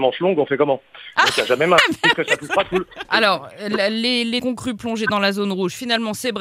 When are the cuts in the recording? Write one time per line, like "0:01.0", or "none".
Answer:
0:03.1
0:04.4